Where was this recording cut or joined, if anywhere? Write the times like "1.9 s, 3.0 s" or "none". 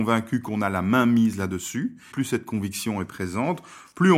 2.1 s